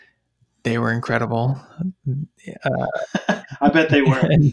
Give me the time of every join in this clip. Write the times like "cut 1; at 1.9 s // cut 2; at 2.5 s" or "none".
none